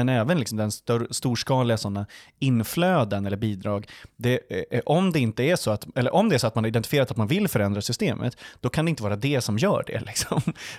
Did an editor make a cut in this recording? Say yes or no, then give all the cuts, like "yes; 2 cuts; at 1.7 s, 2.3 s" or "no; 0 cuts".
no; 0 cuts